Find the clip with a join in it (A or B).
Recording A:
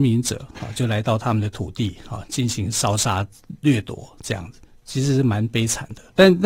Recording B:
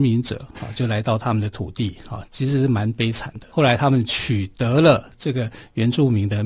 B